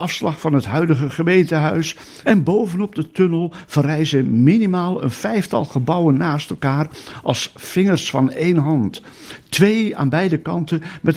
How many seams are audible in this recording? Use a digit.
1